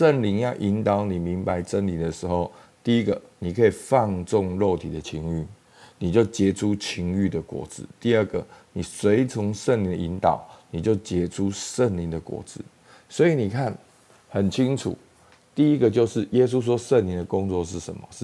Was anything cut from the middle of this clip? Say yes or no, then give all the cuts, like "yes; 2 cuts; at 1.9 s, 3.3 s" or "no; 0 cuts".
no; 0 cuts